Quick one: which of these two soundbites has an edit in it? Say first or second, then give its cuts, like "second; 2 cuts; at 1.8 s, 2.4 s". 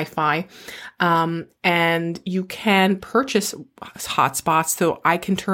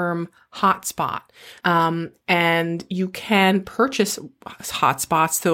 second; 1 cut; at 1.6 s